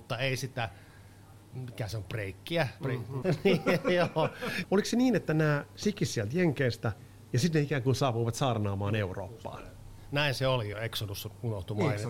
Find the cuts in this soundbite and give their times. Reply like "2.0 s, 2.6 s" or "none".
3.2 s, 4.6 s, 10.7 s